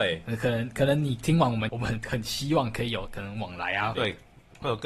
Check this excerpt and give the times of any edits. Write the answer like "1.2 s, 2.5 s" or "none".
1.7 s, 3.9 s